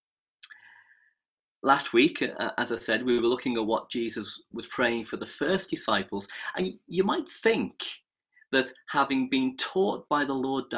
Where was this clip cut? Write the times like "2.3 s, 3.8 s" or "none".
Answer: none